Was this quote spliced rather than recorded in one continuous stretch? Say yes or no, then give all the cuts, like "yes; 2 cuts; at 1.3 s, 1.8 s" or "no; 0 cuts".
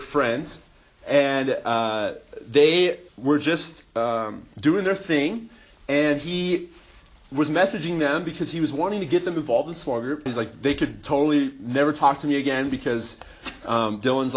yes; 2 cuts; at 3.1 s, 10.3 s